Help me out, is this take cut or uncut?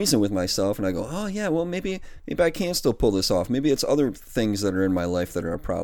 uncut